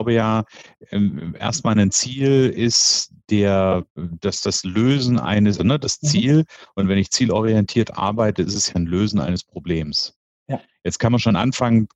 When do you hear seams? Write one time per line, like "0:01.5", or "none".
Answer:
0:05.6